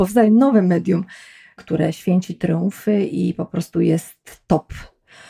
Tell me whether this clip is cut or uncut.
uncut